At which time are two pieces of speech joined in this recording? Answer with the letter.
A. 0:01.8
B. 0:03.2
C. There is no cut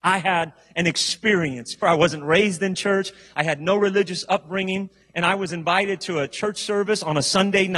A